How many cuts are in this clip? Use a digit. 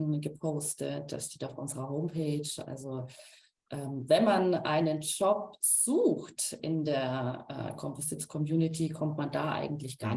0